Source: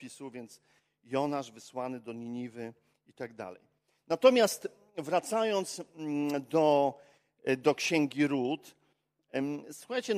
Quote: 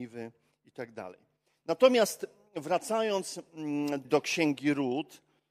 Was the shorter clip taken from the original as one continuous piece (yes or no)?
no